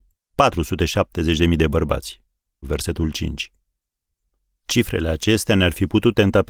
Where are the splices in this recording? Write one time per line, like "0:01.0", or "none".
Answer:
0:02.6